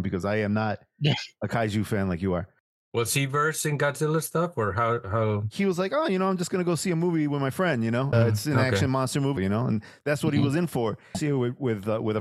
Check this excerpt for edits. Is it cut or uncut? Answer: cut